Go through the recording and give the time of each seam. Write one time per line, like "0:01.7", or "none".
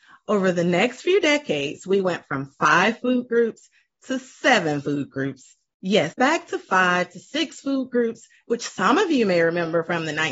0:06.1
0:08.4